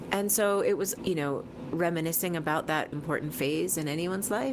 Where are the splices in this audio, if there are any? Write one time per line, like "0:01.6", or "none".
0:01.0
0:02.9